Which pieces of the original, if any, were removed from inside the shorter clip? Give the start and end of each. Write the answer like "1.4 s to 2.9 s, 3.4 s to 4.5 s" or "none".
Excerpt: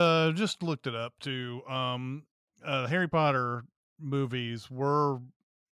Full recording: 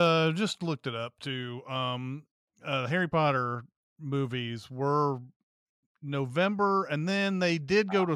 none